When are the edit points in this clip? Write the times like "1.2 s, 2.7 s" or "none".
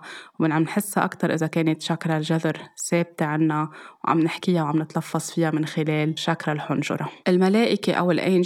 7.2 s